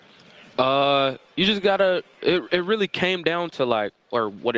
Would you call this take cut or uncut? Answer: uncut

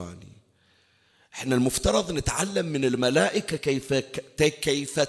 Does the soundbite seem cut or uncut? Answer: uncut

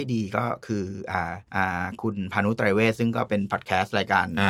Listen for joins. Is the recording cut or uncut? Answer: cut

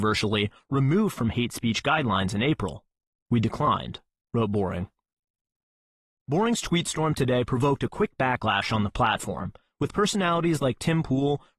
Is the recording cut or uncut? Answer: cut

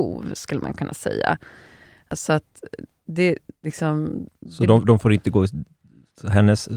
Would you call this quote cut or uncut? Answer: cut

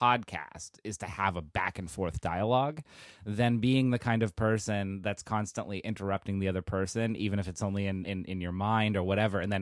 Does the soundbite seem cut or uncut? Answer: uncut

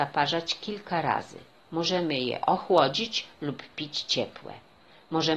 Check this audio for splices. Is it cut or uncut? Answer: uncut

